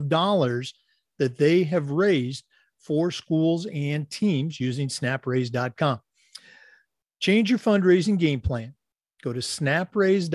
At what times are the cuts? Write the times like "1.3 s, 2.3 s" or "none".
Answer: none